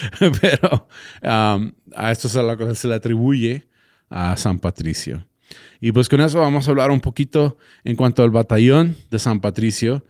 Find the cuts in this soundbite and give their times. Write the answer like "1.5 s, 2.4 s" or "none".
none